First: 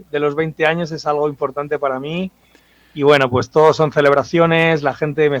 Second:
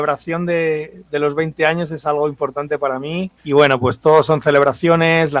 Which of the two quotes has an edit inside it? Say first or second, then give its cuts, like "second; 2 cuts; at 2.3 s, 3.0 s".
second; 1 cut; at 3.4 s